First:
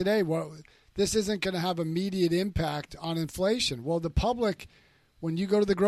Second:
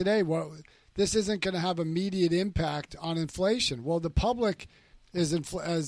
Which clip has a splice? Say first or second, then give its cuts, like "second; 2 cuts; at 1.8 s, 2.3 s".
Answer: second; 1 cut; at 4.9 s